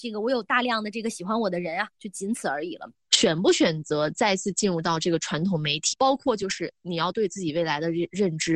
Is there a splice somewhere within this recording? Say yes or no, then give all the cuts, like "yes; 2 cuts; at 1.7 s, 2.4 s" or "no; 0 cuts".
yes; 2 cuts; at 2.9 s, 5.9 s